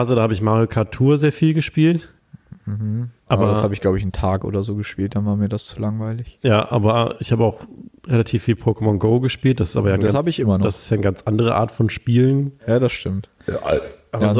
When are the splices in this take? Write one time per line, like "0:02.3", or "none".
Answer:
none

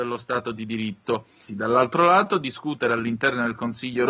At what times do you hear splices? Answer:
0:01.5

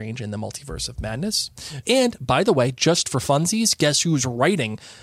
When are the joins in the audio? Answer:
0:01.8

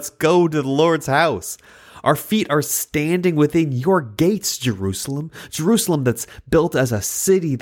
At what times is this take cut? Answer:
none

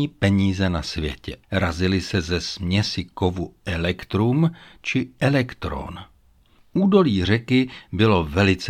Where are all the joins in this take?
0:01.4

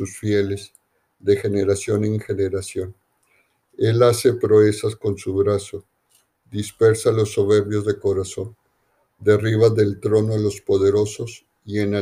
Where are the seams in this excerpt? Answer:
none

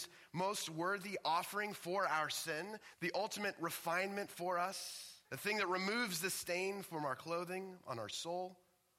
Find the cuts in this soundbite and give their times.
0:02.9
0:05.2

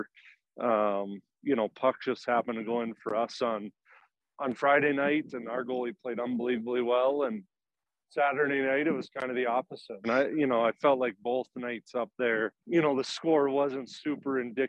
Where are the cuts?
0:10.0
0:12.6

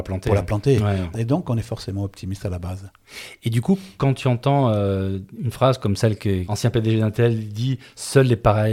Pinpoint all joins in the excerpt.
0:01.1
0:06.4

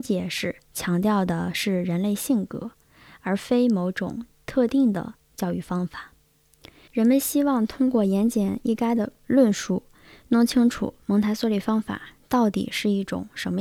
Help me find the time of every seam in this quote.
0:06.9

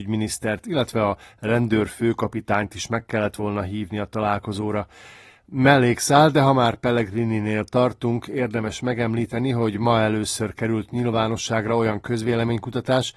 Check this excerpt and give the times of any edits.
none

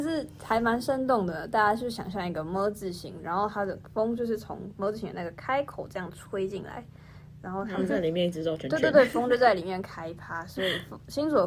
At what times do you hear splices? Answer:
none

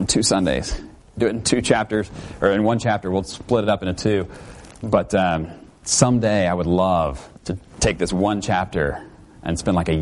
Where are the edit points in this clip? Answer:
0:07.3

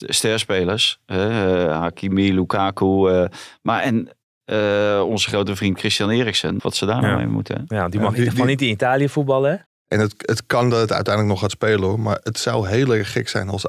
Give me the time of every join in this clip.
0:06.6
0:09.7

